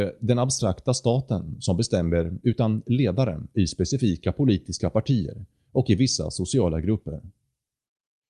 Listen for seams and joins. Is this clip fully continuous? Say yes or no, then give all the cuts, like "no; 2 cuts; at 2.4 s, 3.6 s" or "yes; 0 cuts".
yes; 0 cuts